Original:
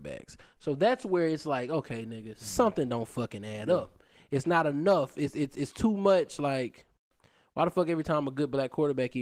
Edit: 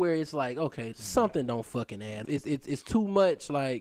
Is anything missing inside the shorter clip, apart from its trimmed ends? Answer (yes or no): yes